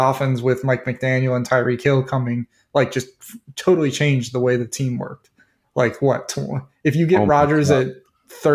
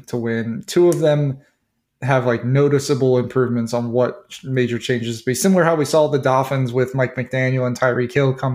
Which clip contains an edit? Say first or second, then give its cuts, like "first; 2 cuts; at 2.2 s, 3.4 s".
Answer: first; 1 cut; at 5.6 s